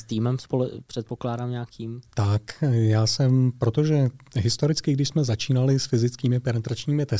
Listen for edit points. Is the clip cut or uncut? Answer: uncut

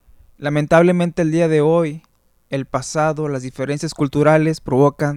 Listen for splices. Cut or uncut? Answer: uncut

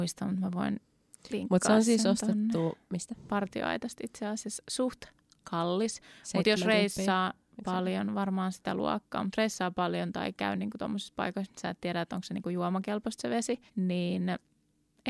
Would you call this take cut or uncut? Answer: cut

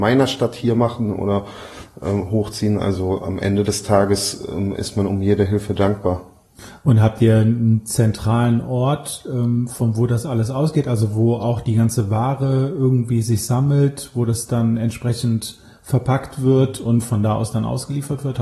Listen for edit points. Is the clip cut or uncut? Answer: uncut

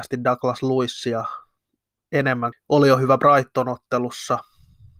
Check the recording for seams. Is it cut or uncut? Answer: cut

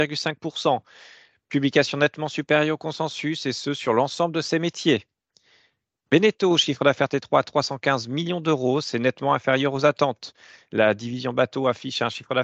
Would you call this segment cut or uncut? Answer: uncut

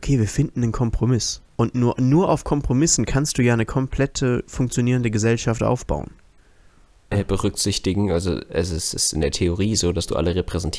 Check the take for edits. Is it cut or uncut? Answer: cut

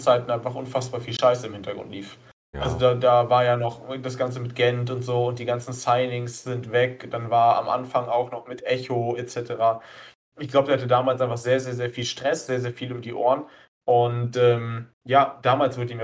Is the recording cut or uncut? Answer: uncut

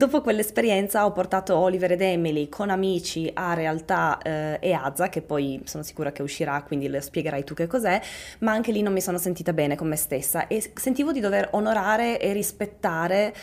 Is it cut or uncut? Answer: uncut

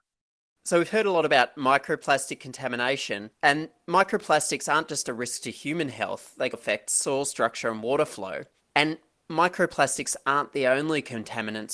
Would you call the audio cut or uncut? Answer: cut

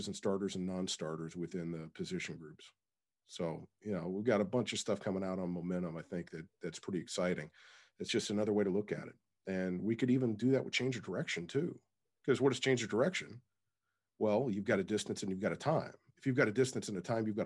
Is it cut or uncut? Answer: uncut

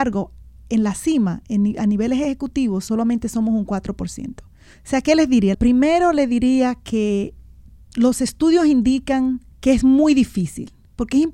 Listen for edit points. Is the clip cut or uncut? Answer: cut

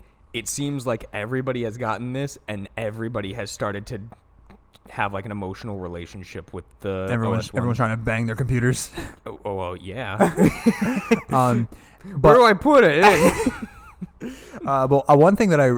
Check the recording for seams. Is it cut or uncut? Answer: uncut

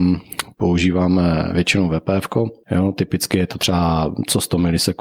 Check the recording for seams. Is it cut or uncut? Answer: cut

